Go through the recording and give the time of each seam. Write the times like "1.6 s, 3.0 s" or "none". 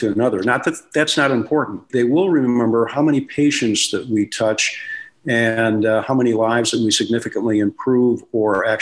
1.9 s